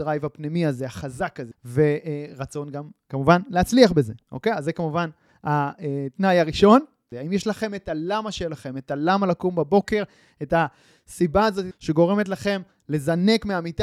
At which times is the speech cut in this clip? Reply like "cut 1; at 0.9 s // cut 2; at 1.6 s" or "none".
cut 1; at 1.5 s // cut 2; at 7.1 s // cut 3; at 11.7 s